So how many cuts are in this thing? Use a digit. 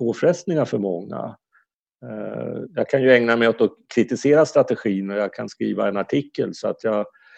1